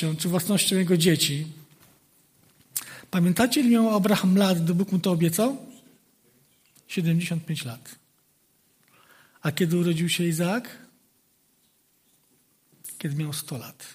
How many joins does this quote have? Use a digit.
0